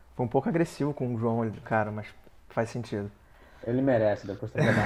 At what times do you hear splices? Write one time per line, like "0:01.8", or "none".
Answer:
0:01.6